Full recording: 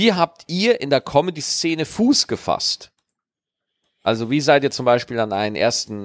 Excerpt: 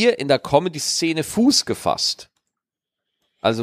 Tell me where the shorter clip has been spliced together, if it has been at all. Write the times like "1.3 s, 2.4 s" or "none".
none